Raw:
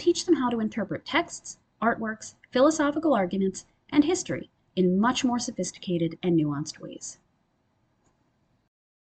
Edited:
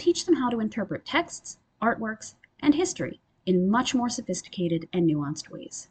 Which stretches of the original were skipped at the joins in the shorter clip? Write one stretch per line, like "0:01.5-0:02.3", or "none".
0:02.5-0:03.8